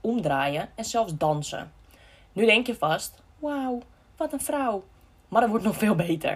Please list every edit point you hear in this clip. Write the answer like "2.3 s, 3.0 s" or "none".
none